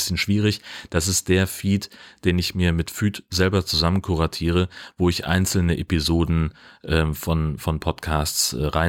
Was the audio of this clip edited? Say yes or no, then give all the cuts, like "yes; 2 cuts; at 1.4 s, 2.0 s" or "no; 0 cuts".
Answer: no; 0 cuts